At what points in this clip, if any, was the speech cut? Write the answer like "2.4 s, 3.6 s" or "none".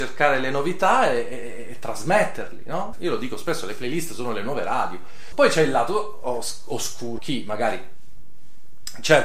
2.9 s, 5.3 s, 7.2 s